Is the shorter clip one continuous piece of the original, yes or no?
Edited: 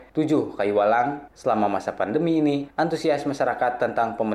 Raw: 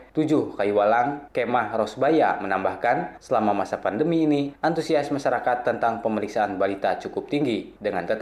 no